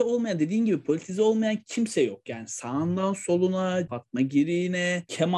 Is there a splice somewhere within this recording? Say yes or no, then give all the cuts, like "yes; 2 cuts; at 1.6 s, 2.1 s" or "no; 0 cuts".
yes; 1 cut; at 3.9 s